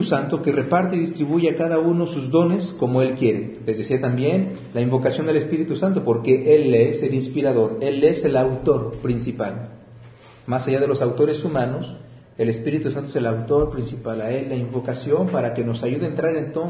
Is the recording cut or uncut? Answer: uncut